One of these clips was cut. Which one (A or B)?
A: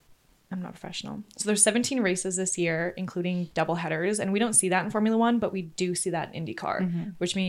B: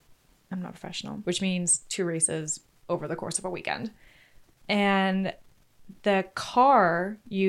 B